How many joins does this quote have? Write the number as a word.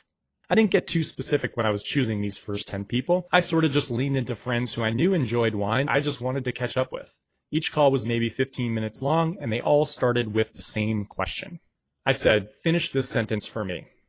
one